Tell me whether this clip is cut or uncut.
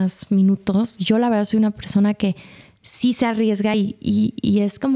uncut